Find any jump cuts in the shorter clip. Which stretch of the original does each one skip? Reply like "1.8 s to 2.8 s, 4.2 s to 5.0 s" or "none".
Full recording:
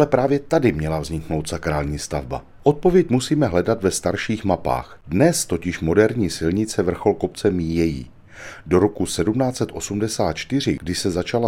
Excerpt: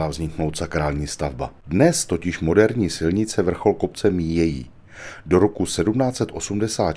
2.5 s to 5.0 s